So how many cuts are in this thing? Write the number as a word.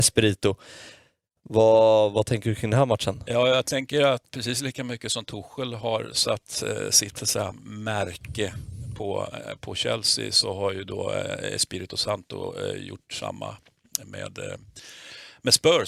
one